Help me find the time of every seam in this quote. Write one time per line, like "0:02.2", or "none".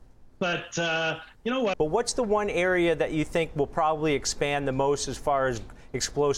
0:01.7